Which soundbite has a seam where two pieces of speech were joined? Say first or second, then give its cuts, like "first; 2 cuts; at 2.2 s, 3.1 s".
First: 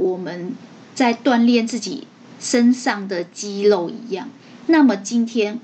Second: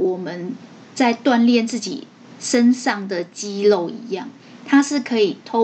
first; 1 cut; at 4.6 s